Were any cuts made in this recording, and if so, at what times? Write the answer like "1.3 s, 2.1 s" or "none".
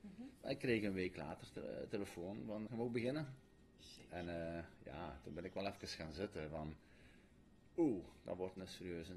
2.7 s